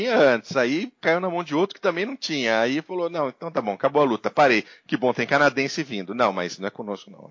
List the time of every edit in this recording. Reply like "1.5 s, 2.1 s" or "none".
none